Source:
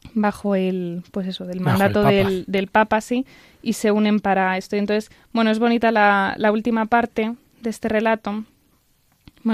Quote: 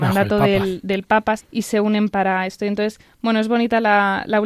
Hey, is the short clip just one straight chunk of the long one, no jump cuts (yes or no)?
no